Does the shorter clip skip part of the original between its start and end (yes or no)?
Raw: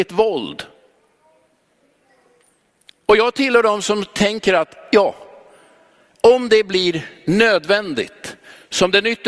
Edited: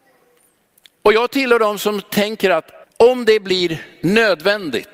yes